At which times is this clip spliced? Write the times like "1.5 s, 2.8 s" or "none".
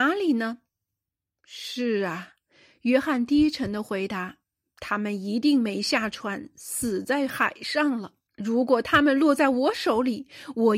8.3 s